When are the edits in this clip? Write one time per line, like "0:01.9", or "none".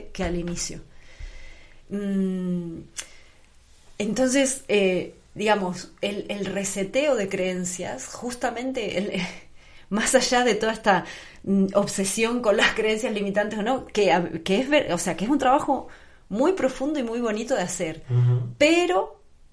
none